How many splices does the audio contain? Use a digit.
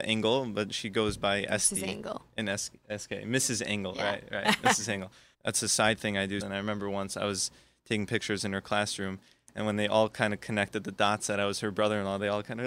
2